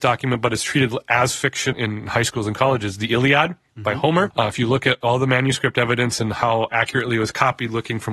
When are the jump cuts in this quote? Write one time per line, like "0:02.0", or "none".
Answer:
0:01.7
0:04.3